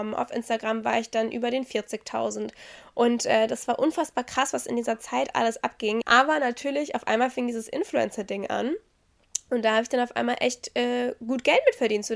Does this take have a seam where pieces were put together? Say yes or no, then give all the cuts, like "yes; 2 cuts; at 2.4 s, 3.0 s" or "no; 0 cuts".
yes; 1 cut; at 6.0 s